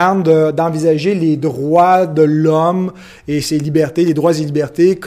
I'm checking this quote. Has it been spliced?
no; 0 cuts

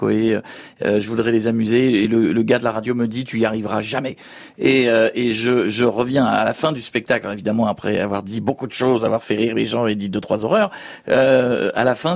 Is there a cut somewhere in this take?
no; 0 cuts

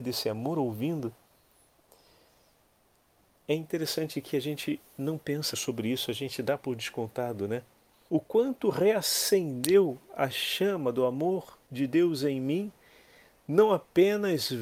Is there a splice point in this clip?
yes; 3 cuts; at 5.5 s, 8.1 s, 11.6 s

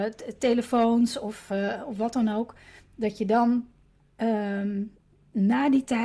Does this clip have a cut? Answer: no; 0 cuts

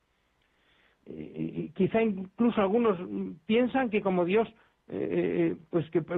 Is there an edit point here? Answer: yes; 1 cut; at 1.0 s

